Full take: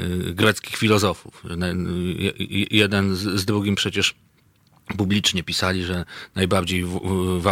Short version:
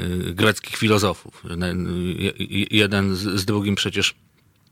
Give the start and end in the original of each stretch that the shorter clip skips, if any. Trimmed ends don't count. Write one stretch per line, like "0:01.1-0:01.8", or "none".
none